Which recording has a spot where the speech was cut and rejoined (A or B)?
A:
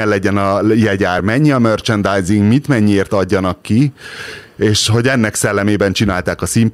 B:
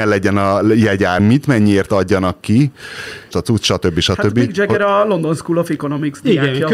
B